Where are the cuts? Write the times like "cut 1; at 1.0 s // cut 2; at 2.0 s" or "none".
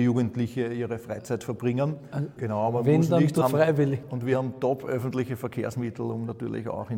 cut 1; at 2.4 s // cut 2; at 3.4 s